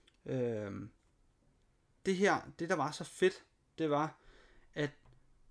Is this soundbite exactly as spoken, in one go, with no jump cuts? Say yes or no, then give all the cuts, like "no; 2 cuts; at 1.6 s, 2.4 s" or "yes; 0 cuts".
yes; 0 cuts